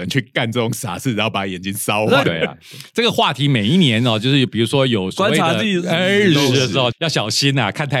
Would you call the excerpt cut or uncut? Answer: cut